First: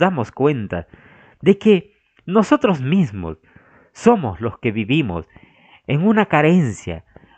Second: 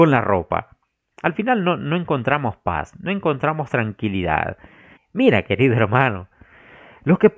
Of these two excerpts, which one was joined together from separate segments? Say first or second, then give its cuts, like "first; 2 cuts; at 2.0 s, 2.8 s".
second; 2 cuts; at 1.1 s, 5.0 s